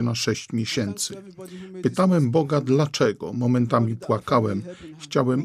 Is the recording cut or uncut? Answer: uncut